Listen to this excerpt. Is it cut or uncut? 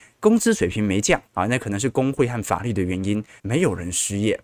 cut